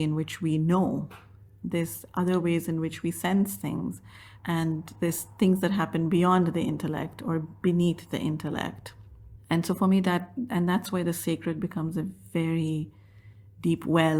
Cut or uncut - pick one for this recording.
cut